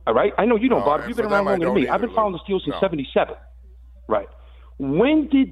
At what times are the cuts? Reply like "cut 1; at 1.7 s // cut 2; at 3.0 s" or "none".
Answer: none